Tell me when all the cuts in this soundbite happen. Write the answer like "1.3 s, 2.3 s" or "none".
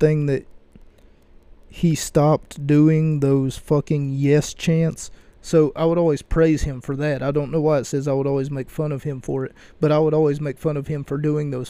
none